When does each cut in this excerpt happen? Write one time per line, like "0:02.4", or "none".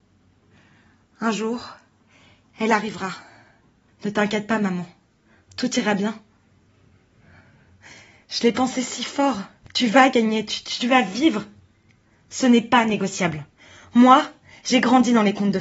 0:03.9